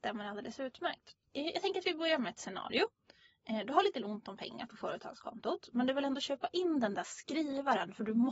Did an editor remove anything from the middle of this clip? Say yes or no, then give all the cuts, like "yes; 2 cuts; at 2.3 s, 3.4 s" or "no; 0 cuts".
no; 0 cuts